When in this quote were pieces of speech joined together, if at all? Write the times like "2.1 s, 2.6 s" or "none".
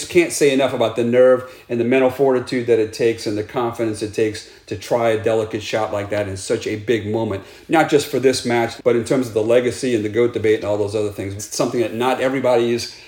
8.8 s, 11.4 s